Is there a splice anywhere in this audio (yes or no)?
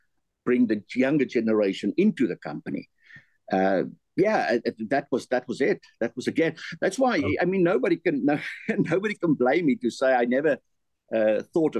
no